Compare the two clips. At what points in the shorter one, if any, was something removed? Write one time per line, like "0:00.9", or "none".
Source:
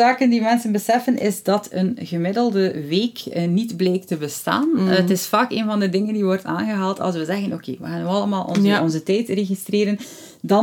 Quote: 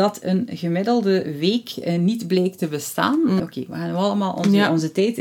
0:03.4